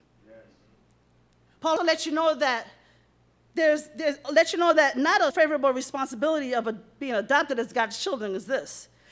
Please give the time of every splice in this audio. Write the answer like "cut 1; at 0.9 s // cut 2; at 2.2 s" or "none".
cut 1; at 1.8 s // cut 2; at 5.3 s